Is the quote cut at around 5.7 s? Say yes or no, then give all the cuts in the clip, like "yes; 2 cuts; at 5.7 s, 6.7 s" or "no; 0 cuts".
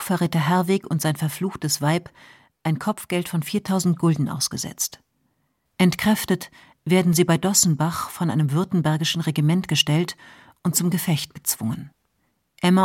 yes; 1 cut; at 5.7 s